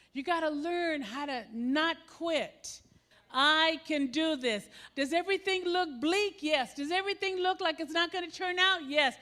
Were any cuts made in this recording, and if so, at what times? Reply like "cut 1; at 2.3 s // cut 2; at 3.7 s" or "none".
cut 1; at 3.1 s // cut 2; at 4.9 s